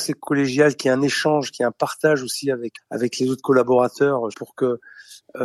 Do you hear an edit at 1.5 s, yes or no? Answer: no